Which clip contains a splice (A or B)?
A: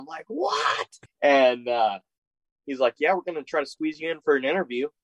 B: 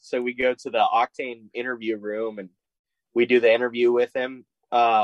A